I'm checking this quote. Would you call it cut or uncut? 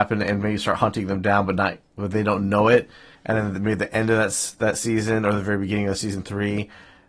uncut